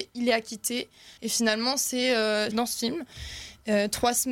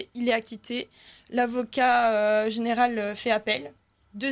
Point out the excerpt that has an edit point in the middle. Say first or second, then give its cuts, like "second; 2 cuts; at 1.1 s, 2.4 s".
first; 2 cuts; at 1.2 s, 2.5 s